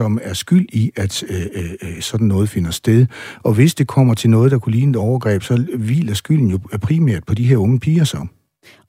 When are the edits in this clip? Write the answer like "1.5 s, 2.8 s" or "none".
none